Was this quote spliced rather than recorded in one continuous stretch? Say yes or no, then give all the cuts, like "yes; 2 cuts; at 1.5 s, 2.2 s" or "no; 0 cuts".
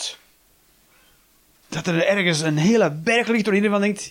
no; 0 cuts